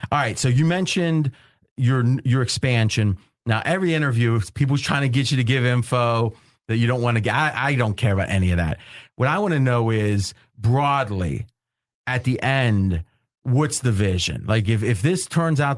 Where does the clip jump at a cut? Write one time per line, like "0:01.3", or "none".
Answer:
0:14.7